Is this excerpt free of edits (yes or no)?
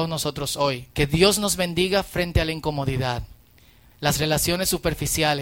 no